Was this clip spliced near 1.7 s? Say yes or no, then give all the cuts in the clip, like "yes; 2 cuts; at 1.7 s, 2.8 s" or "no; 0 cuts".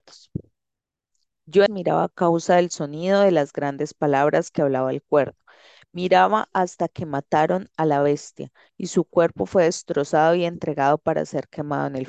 yes; 1 cut; at 1.7 s